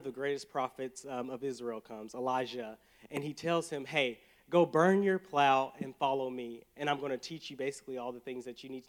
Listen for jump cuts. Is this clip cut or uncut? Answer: uncut